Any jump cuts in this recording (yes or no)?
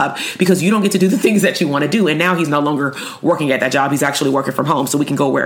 no